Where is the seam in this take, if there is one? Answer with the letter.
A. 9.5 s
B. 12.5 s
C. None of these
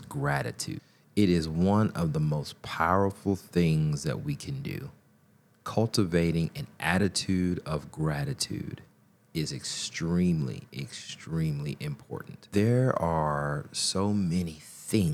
C